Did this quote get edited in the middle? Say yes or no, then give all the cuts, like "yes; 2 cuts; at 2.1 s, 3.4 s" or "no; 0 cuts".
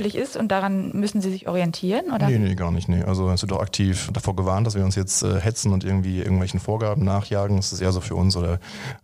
no; 0 cuts